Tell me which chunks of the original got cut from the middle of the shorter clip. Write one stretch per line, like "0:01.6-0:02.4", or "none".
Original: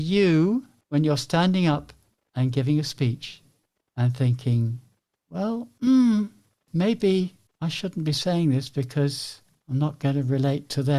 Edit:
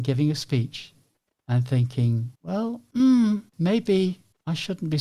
0:04.8-0:05.2
0:06.3-0:06.6